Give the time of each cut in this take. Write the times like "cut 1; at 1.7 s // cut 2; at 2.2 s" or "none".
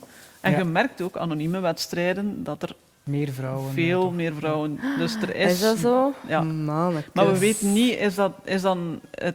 none